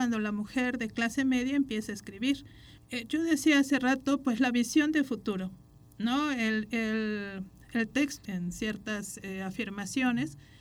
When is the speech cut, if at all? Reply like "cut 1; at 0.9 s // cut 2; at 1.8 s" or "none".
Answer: cut 1; at 2.8 s // cut 2; at 8.2 s